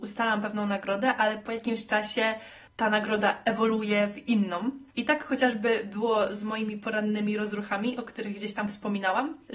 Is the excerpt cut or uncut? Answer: uncut